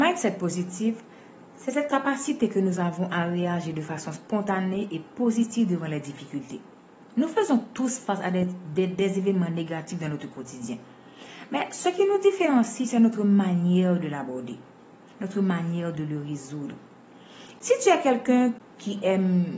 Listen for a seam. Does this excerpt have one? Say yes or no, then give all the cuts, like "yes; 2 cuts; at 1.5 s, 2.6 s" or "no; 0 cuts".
yes; 1 cut; at 17.6 s